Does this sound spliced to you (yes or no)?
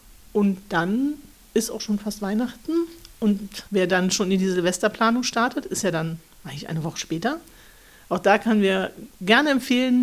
yes